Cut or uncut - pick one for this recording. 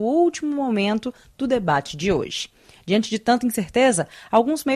uncut